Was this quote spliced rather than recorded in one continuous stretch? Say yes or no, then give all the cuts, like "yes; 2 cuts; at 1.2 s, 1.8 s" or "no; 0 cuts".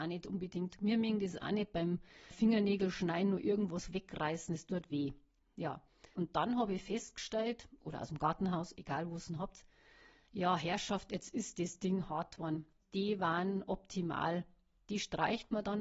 yes; 2 cuts; at 6.1 s, 12.8 s